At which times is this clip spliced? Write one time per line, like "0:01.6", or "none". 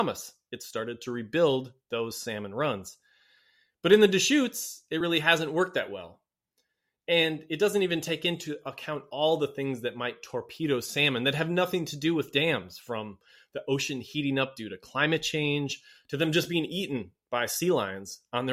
none